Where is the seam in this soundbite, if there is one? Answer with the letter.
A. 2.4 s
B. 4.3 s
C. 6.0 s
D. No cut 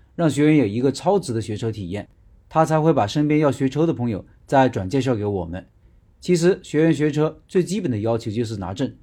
C